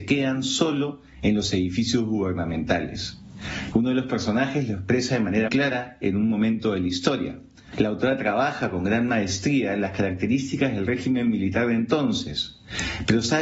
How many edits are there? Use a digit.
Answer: 3